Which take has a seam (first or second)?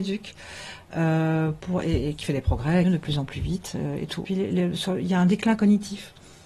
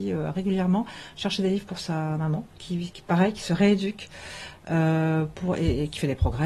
first